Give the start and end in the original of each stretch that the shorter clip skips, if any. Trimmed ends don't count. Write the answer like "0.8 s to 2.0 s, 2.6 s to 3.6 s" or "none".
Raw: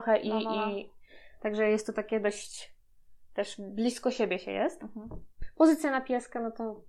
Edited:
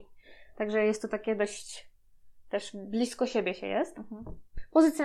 none